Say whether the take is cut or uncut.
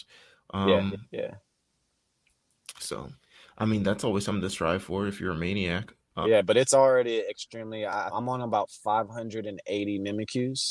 cut